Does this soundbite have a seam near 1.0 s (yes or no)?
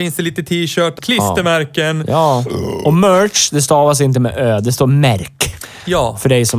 yes